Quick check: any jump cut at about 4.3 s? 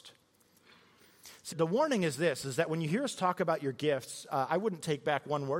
no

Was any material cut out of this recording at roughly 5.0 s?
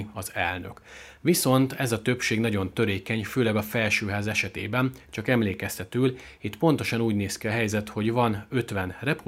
no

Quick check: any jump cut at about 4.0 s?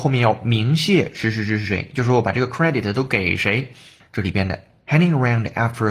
yes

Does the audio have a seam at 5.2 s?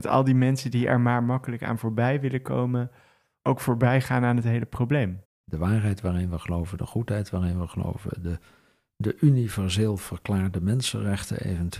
yes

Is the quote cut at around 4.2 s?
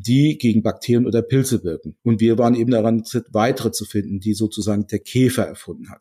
no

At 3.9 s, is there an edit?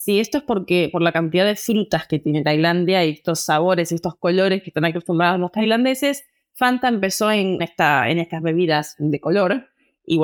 no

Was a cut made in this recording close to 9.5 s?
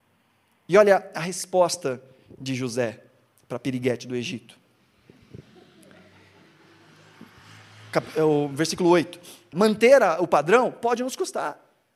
yes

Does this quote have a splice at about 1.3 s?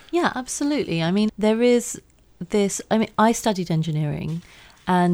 yes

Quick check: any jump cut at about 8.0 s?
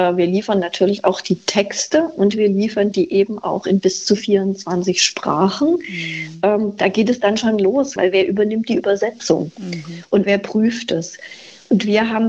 yes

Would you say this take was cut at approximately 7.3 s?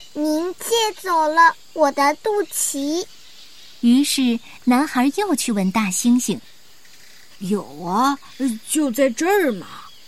yes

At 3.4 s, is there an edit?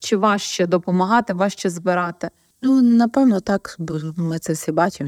no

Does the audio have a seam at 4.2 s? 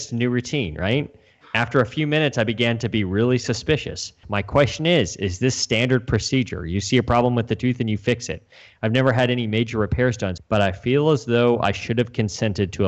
yes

